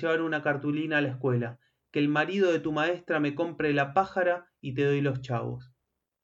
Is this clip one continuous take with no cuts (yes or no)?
yes